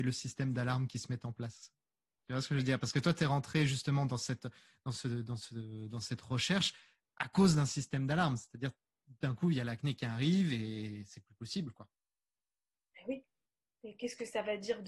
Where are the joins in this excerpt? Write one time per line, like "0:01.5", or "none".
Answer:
none

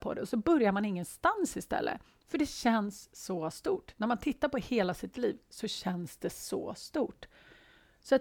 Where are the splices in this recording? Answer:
none

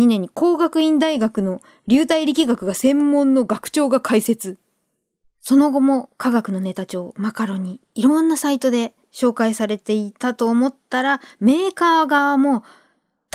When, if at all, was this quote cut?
none

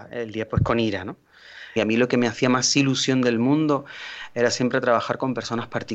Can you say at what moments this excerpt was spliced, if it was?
0:01.8

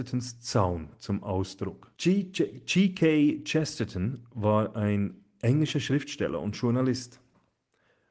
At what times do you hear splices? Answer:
0:01.9

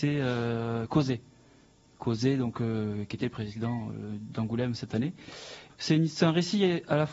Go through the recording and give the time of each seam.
0:05.7

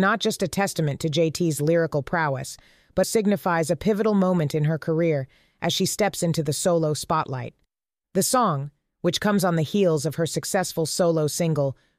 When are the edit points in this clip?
0:03.0

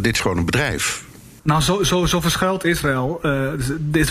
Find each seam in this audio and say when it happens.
0:01.4

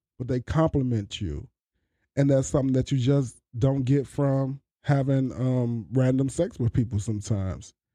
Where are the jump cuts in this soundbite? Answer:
0:04.7

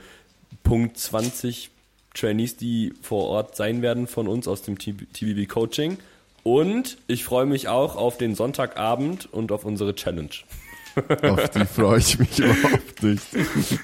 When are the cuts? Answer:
none

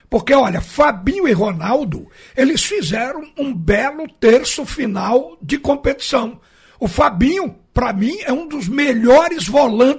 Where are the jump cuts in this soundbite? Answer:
none

